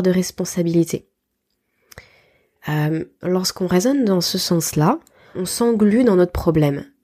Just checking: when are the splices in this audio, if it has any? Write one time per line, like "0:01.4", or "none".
0:03.2
0:05.3